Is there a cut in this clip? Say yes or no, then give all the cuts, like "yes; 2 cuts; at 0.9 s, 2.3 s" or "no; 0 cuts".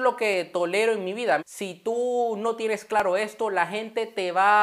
yes; 1 cut; at 1.4 s